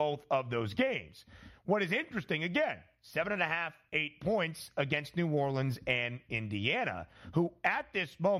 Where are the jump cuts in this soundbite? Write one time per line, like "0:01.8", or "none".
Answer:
none